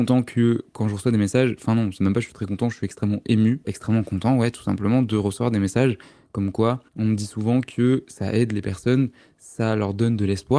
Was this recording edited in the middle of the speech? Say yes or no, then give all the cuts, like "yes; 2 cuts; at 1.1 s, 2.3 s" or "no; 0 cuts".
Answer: yes; 2 cuts; at 3.6 s, 6.9 s